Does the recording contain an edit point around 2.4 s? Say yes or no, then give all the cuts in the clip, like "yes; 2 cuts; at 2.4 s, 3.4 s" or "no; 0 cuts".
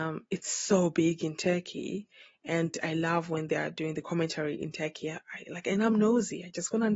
no; 0 cuts